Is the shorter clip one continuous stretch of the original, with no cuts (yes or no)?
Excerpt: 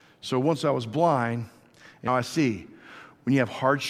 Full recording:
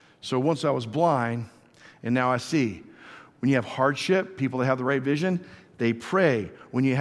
no